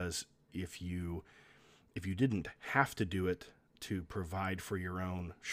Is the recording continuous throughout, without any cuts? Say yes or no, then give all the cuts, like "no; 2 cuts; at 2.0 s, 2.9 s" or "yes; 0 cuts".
yes; 0 cuts